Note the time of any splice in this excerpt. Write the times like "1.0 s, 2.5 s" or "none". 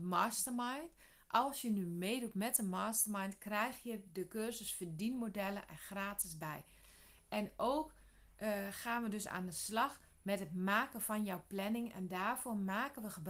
none